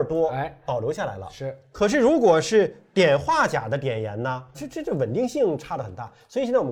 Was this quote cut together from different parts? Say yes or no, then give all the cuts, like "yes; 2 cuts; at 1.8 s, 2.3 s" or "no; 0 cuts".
yes; 1 cut; at 4.5 s